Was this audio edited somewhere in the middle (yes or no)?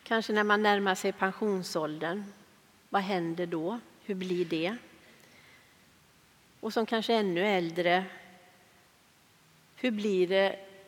no